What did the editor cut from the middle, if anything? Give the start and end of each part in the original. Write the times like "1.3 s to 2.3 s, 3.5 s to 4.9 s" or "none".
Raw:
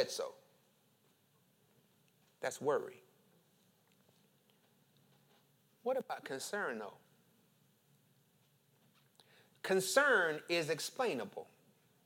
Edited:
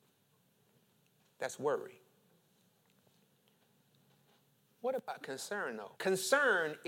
7.0 s to 9.6 s